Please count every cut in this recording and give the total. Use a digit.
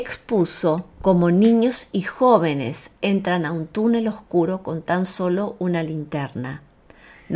1